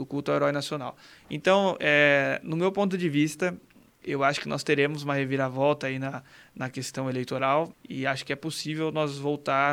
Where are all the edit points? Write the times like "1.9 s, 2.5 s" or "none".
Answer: 7.7 s